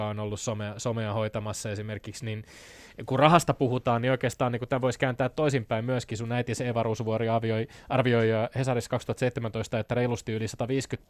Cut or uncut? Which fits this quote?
uncut